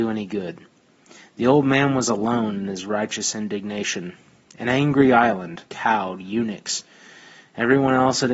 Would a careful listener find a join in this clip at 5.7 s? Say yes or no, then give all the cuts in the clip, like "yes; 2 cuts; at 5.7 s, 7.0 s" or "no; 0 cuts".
yes; 1 cut; at 5.7 s